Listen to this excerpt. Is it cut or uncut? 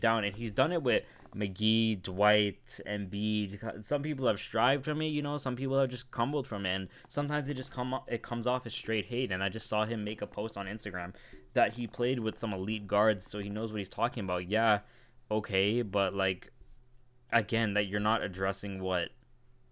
uncut